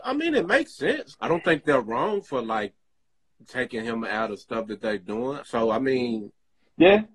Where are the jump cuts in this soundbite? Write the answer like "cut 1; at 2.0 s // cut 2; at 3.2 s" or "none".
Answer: cut 1; at 1.1 s // cut 2; at 5.4 s